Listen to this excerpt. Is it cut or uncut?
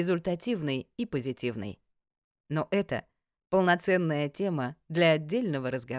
uncut